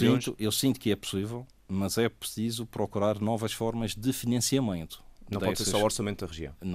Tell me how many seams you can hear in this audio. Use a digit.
0